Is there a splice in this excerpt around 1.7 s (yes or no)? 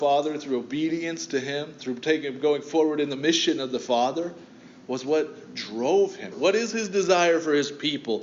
no